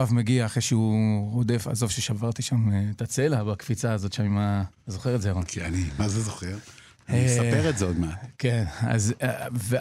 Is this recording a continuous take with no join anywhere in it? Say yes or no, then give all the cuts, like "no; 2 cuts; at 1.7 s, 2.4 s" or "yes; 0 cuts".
no; 1 cut; at 4.7 s